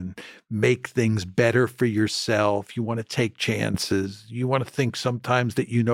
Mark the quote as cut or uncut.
uncut